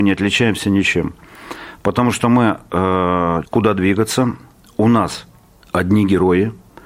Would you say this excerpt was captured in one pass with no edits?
no; 1 cut; at 3.4 s

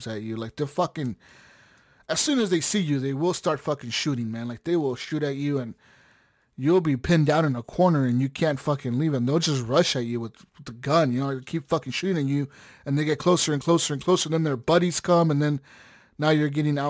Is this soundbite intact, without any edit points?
yes; 0 cuts

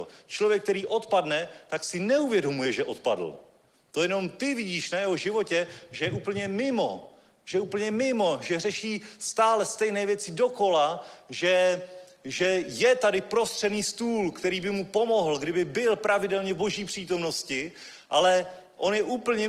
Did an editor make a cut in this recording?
no; 0 cuts

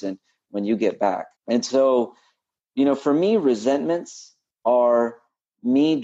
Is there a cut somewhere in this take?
yes; 1 cut; at 1.4 s

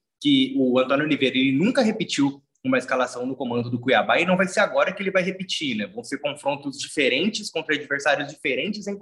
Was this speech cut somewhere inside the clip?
no; 0 cuts

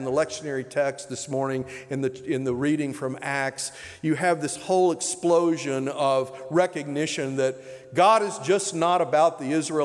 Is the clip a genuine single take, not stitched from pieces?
yes; 0 cuts

